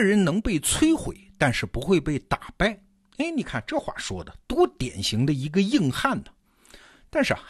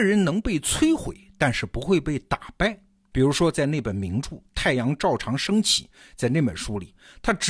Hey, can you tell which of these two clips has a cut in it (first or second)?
second